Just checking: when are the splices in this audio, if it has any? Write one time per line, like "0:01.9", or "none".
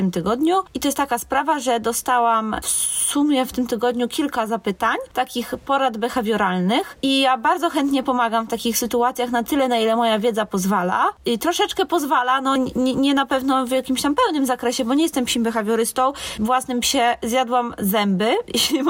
0:12.6
0:16.4

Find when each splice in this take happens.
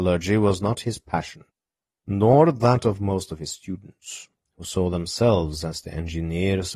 none

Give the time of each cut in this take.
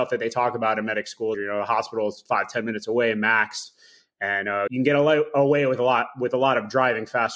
0:01.3
0:04.7

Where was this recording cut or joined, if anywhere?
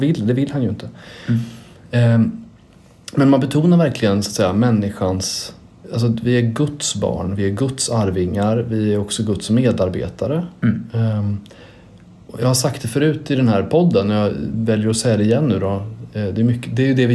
none

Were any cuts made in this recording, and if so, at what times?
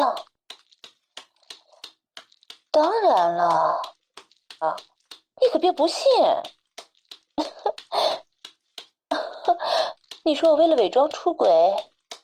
0:04.6

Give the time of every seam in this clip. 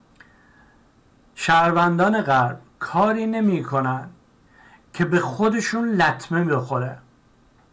none

